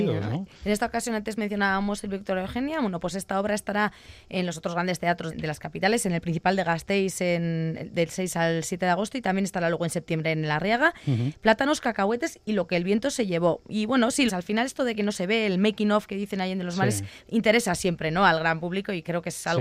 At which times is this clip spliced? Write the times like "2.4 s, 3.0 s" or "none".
5.3 s, 14.3 s